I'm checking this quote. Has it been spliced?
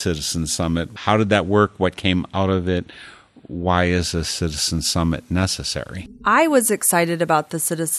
no; 0 cuts

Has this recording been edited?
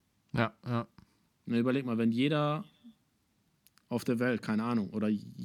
no; 0 cuts

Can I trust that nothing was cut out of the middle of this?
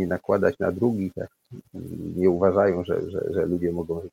yes; 0 cuts

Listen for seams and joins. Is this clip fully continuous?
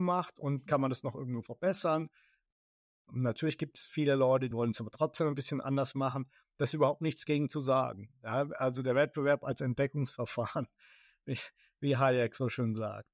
no; 1 cut; at 4.5 s

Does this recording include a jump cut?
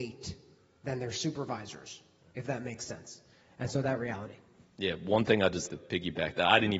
yes; 1 cut; at 5.7 s

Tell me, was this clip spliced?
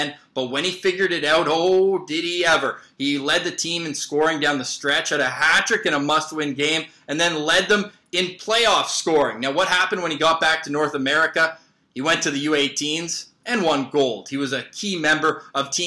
no; 0 cuts

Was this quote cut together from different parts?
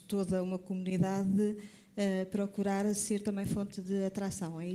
no; 0 cuts

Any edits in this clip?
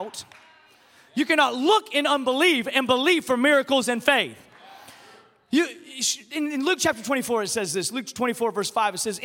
no; 0 cuts

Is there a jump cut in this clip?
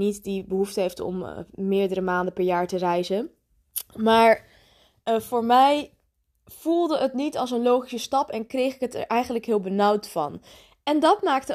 no; 0 cuts

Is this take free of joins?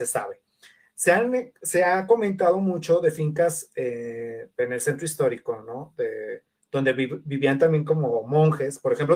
yes; 0 cuts

